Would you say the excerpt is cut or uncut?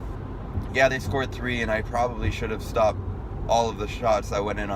uncut